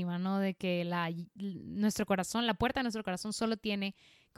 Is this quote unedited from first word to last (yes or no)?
yes